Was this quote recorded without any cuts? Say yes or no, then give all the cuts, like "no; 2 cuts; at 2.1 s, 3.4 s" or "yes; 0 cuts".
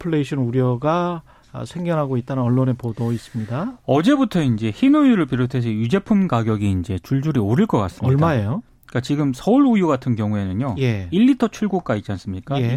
yes; 0 cuts